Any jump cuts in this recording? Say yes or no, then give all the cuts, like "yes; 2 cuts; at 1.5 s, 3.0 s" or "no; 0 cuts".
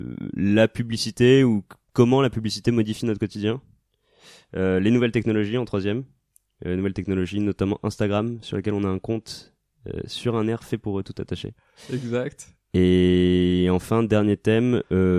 no; 0 cuts